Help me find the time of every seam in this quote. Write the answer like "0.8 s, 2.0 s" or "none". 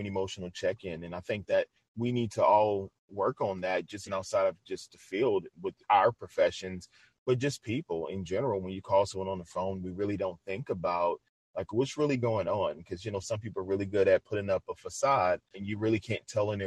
4.1 s, 15.5 s

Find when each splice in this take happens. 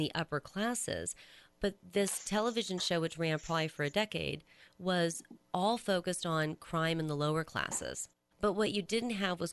8.3 s

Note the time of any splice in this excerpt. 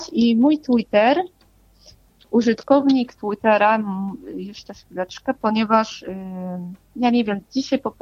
none

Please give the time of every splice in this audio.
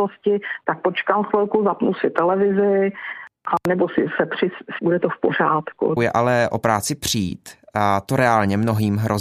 4.8 s, 6.0 s

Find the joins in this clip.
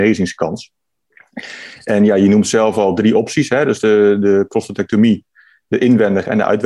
none

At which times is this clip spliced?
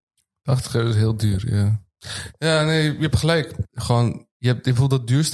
none

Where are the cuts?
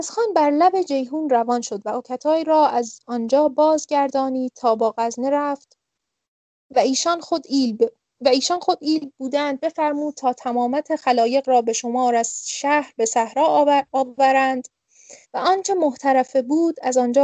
8.1 s, 15.2 s

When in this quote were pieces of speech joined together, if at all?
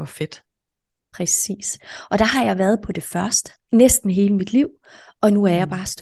3.6 s

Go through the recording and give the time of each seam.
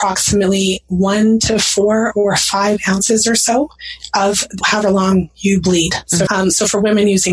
4.6 s, 6.3 s

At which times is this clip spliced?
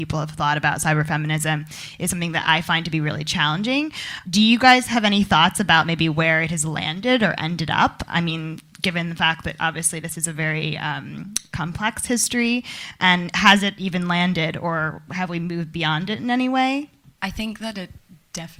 none

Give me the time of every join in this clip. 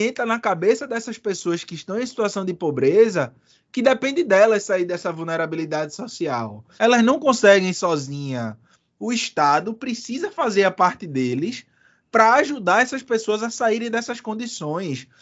6.8 s

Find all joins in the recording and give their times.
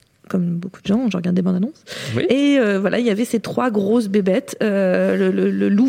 none

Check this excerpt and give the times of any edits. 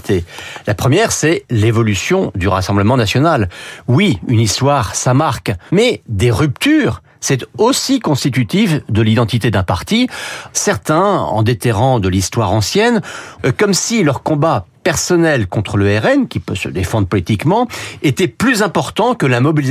5.7 s, 10.5 s, 13.4 s

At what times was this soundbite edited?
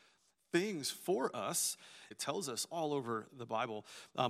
2.1 s, 3.3 s

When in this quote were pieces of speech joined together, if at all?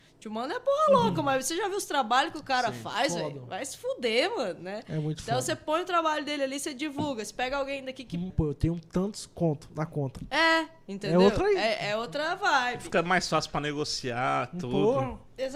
8.3 s

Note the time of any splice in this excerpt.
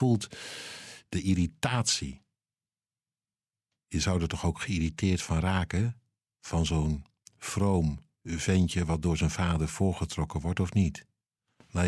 none

